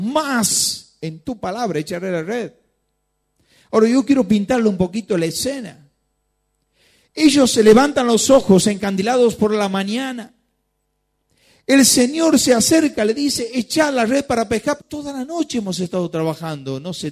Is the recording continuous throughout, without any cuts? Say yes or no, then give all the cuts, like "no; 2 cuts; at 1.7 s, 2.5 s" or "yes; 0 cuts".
no; 1 cut; at 14.8 s